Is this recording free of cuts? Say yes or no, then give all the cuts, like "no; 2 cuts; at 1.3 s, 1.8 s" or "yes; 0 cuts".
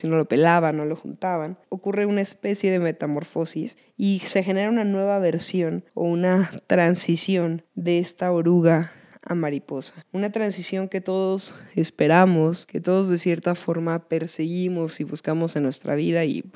no; 1 cut; at 1.7 s